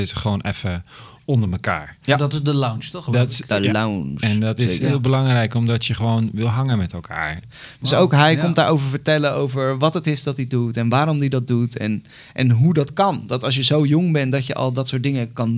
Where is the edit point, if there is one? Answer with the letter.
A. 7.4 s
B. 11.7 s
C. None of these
A